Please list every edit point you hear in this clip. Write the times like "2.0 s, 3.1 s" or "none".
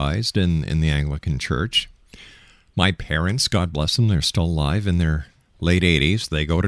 none